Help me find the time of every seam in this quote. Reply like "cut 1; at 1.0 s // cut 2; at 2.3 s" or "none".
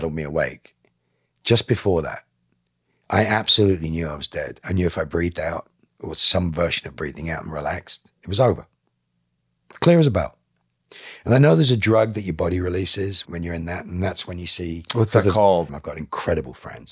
cut 1; at 13.2 s // cut 2; at 15.7 s